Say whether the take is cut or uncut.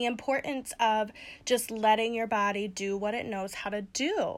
uncut